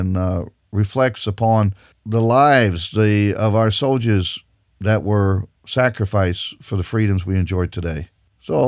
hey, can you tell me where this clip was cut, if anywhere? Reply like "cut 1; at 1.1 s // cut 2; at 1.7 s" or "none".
cut 1; at 2.0 s